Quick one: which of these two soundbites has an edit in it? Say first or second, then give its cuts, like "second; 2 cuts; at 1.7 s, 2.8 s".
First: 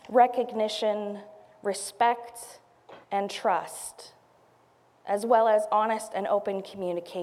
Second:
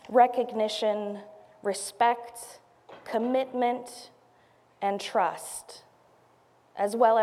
first; 1 cut; at 3.0 s